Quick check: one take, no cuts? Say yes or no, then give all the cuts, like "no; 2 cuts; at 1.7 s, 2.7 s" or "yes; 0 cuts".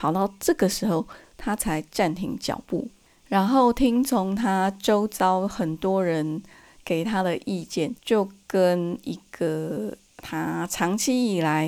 no; 1 cut; at 8.0 s